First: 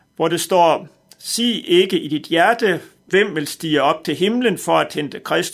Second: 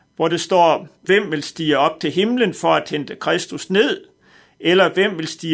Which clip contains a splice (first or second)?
second